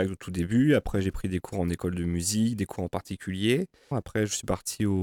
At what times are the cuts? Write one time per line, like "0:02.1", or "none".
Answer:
0:03.9